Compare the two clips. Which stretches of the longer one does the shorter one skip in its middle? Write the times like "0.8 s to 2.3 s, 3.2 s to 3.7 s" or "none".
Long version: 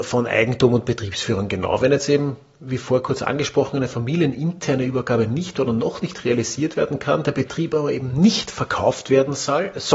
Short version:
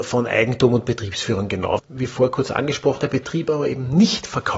1.8 s to 2.5 s, 3.7 s to 7.2 s